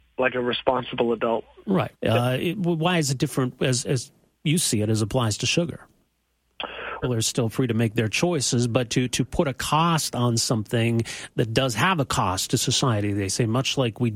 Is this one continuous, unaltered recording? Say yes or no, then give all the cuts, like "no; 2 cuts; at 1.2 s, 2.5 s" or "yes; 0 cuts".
no; 3 cuts; at 1.9 s, 7.0 s, 8.9 s